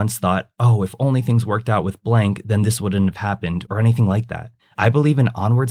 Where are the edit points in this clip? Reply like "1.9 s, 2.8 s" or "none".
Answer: 3.7 s